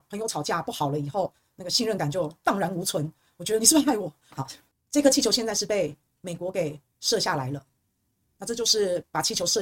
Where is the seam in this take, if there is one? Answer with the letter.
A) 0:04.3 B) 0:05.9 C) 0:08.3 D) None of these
A